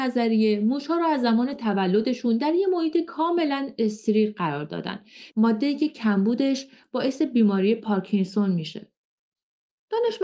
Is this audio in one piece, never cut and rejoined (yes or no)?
no